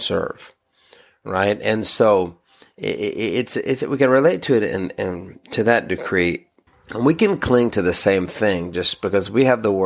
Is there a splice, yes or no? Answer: yes